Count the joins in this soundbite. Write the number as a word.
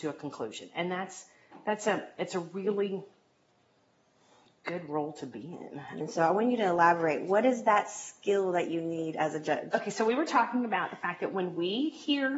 one